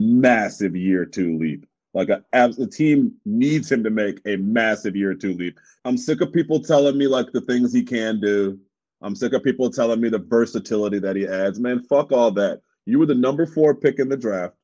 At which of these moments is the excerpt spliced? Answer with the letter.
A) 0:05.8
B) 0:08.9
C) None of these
A